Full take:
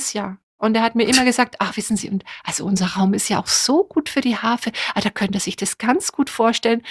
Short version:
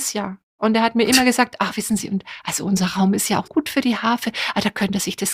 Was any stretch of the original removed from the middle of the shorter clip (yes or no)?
yes